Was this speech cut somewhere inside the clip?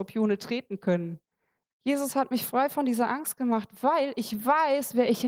yes; 1 cut; at 1.7 s

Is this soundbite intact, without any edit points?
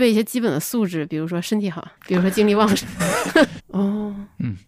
no; 2 cuts; at 2.0 s, 3.6 s

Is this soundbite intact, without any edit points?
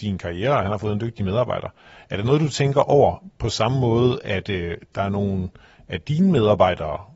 yes; 0 cuts

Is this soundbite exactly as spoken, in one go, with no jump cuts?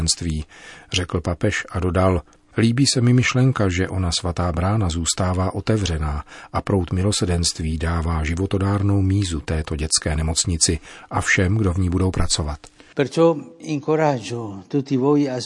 yes; 0 cuts

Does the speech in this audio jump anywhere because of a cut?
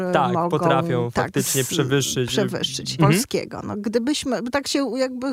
yes; 1 cut; at 3.0 s

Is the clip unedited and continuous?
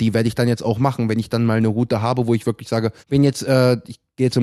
no; 1 cut; at 3.0 s

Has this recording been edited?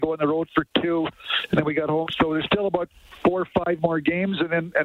no; 0 cuts

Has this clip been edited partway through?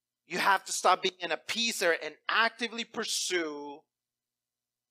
no; 0 cuts

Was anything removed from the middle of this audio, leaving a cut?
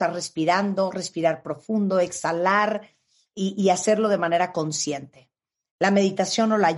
no; 0 cuts

